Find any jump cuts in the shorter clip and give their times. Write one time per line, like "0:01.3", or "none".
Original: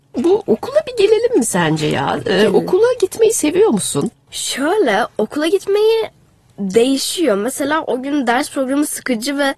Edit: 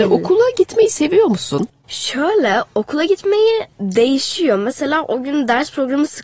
0:03.7